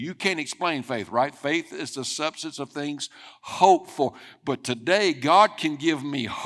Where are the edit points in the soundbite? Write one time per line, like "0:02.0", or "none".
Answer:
none